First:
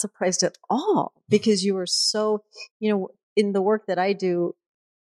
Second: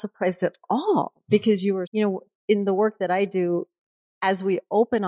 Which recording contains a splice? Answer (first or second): second